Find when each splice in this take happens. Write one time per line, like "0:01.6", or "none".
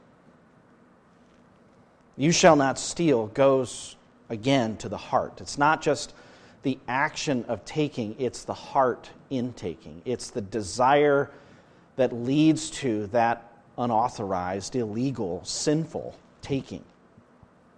none